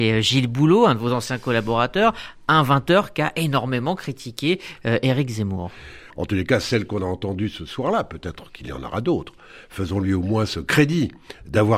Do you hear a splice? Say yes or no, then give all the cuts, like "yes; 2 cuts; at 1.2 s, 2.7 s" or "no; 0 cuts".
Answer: yes; 1 cut; at 6.1 s